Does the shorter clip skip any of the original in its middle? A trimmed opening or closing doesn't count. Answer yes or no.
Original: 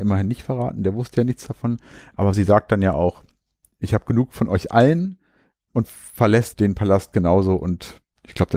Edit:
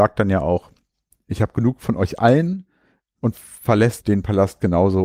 no